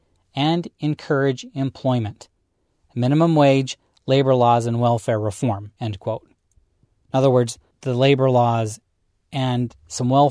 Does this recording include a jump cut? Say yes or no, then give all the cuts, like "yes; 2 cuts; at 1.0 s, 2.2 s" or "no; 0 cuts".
no; 0 cuts